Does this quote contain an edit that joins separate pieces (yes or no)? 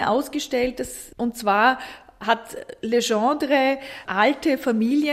yes